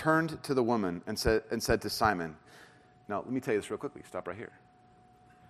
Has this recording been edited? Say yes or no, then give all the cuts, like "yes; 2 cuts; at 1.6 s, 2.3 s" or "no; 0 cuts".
no; 0 cuts